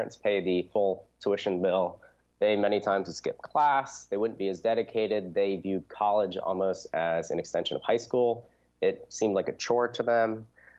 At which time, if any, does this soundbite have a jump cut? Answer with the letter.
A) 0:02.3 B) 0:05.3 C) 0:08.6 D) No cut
D